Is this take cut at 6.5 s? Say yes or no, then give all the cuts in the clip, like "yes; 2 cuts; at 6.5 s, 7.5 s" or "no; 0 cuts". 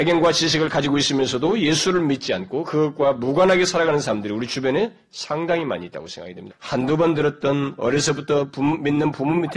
yes; 1 cut; at 6.5 s